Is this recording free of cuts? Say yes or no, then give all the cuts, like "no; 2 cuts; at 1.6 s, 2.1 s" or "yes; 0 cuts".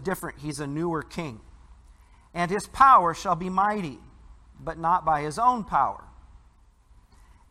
yes; 0 cuts